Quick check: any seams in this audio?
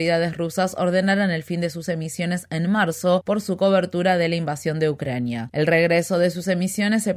yes; 1 cut; at 5.5 s

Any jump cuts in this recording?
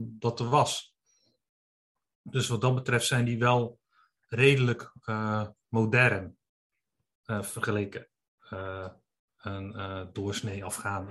no; 0 cuts

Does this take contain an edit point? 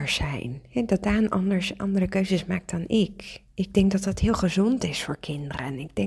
no; 0 cuts

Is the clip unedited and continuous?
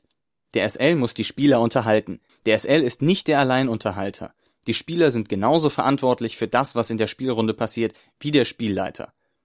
no; 1 cut; at 2.3 s

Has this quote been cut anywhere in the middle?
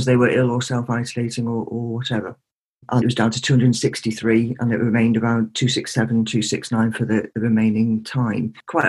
yes; 1 cut; at 3.0 s

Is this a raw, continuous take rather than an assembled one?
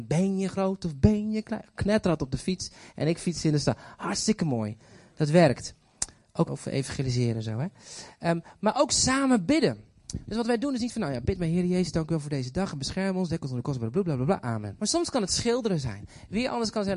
no; 2 cuts; at 6.4 s, 14.8 s

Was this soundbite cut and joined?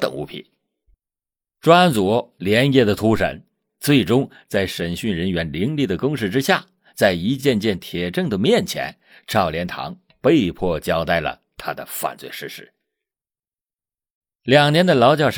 no; 0 cuts

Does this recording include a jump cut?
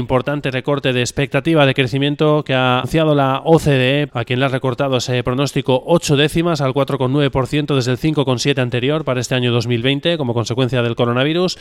yes; 2 cuts; at 2.8 s, 4.1 s

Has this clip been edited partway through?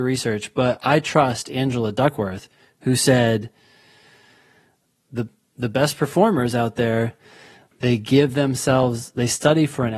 no; 0 cuts

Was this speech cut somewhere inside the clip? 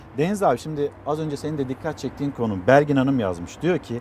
no; 0 cuts

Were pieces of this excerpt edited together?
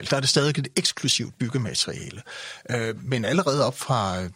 no; 0 cuts

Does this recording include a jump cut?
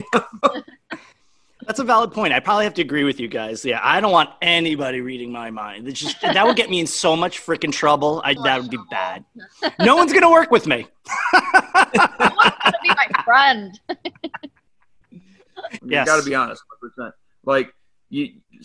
yes; 2 cuts; at 8.4 s, 15.8 s

